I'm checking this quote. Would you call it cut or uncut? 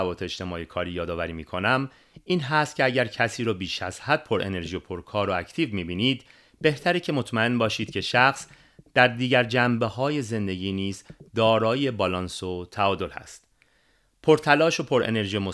uncut